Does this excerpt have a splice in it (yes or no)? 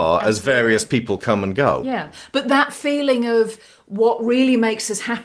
no